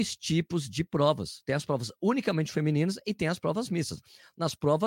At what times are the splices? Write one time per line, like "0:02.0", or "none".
none